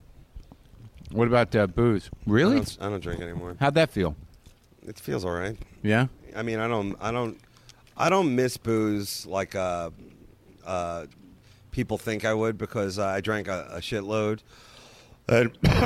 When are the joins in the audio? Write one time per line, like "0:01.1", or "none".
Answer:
0:02.2